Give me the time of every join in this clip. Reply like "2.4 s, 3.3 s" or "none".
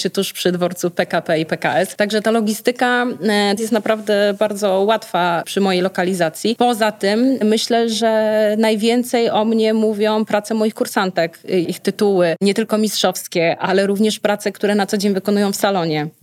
3.6 s, 11.6 s